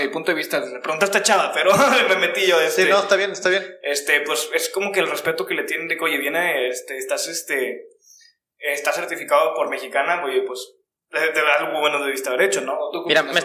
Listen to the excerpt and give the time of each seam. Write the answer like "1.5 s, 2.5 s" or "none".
none